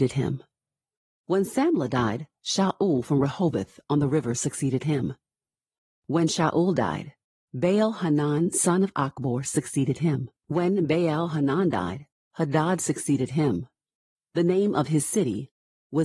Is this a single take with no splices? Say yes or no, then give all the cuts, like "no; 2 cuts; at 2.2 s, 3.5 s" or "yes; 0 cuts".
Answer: no; 2 cuts; at 10.4 s, 14.1 s